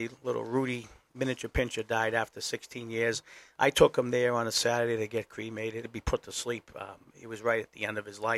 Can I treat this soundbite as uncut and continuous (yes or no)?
no